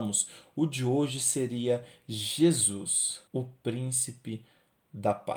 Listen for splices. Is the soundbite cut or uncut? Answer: cut